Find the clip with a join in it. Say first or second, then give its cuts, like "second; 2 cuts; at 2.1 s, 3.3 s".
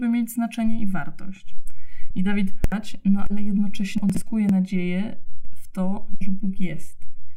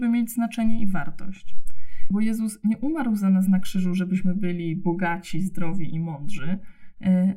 second; 1 cut; at 2.1 s